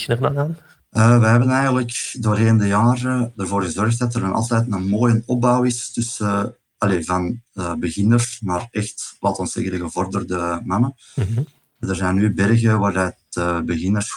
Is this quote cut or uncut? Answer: uncut